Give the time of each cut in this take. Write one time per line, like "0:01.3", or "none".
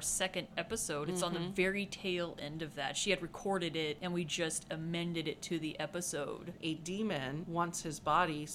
0:06.6